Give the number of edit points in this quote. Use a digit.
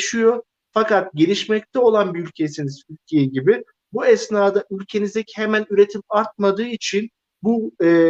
0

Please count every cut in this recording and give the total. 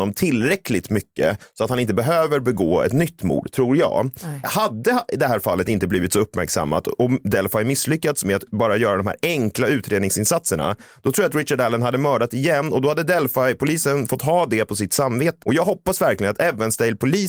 2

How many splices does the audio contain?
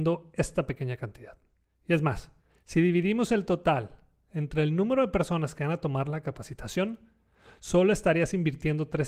0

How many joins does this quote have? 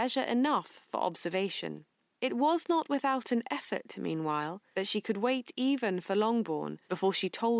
0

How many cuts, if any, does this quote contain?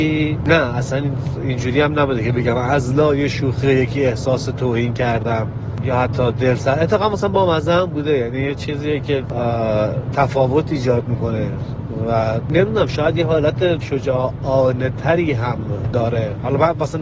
1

